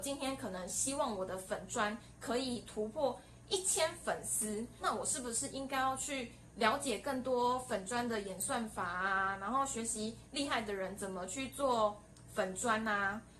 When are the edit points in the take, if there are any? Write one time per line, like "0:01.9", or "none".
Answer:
0:04.8

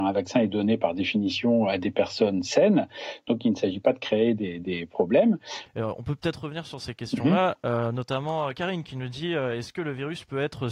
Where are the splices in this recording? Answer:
0:05.7

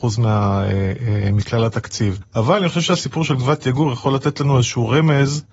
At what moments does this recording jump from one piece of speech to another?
0:02.2

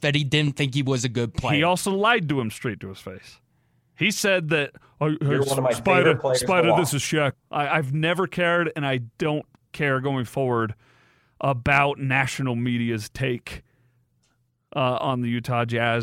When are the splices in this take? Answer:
0:07.3

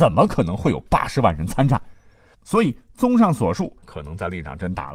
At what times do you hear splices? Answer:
0:02.3
0:03.8

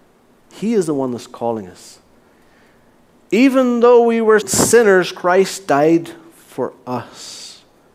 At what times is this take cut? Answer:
0:04.4

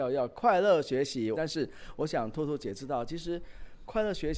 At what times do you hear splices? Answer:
0:01.3

